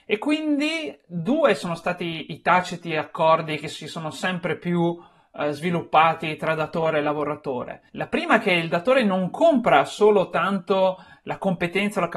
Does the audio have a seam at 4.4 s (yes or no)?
no